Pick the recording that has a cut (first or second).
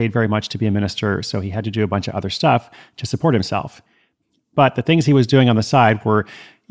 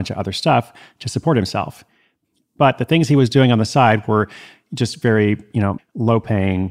second